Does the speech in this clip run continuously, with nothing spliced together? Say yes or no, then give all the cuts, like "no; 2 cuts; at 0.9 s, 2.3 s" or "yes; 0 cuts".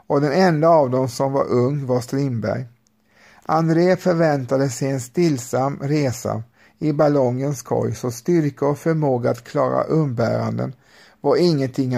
yes; 0 cuts